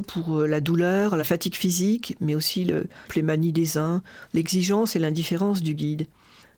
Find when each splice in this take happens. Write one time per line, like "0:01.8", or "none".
0:03.1
0:04.3